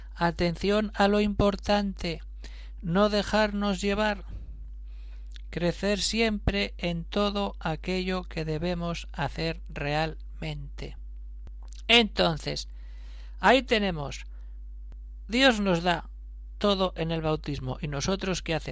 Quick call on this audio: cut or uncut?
uncut